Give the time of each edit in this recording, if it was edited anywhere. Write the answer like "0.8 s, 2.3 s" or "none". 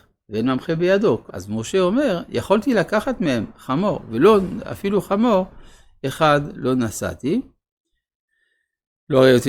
1.3 s